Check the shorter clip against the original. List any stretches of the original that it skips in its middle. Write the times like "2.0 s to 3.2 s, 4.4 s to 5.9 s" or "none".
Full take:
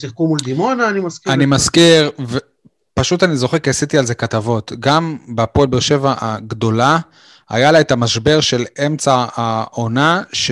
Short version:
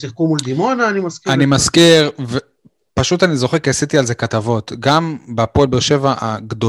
none

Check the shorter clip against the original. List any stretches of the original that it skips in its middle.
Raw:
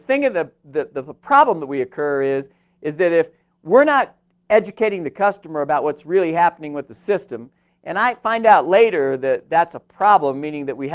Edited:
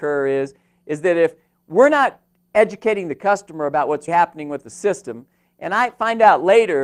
6.0 s to 6.3 s

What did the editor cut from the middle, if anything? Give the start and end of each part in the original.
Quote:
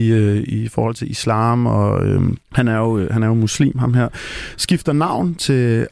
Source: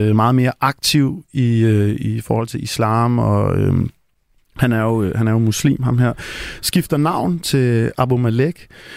3.9 s to 4.5 s

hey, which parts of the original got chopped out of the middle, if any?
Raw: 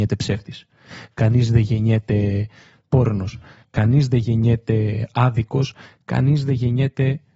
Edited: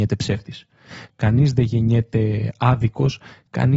1.1 s to 3.6 s

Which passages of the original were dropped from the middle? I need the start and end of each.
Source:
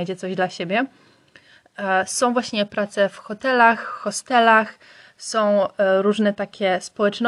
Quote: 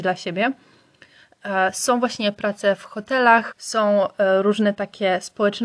3.8 s to 5.1 s

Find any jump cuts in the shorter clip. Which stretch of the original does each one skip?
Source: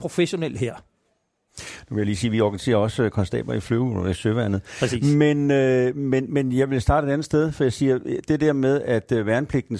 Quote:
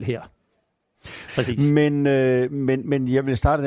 1.8 s to 4.7 s

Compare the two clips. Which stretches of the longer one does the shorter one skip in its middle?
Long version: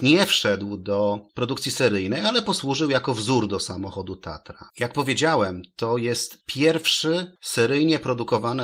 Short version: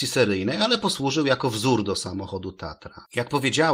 none

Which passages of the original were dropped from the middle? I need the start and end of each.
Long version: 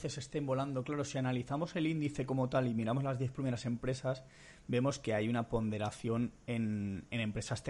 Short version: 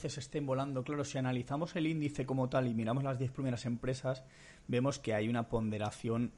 none

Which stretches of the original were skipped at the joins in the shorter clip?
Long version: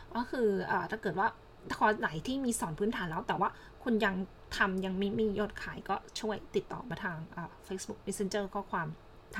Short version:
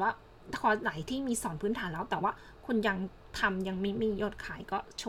none

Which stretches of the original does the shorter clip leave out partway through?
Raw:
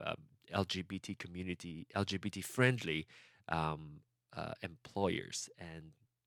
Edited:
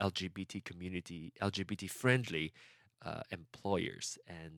3.4 s to 4.2 s

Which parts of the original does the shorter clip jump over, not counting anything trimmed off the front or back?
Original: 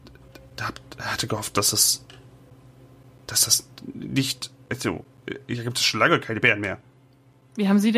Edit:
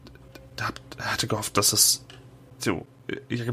2.6 s to 4.8 s

